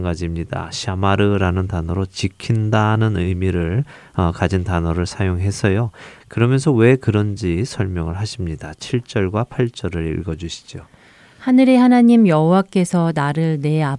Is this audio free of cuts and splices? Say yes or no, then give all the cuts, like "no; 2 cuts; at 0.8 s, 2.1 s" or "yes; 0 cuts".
no; 1 cut; at 6.2 s